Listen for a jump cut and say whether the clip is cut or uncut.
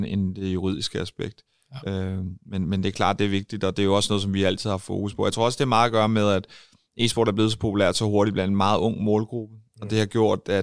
uncut